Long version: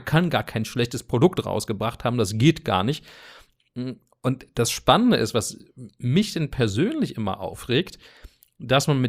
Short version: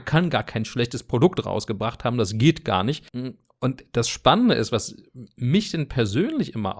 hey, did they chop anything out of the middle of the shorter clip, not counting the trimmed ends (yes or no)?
yes